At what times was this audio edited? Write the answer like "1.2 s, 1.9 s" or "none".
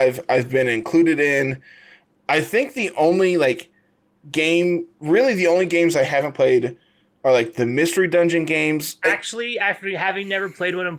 9.0 s